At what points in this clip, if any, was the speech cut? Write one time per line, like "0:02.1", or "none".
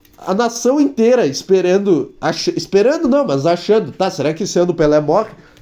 none